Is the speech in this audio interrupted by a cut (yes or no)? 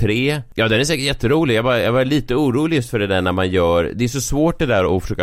no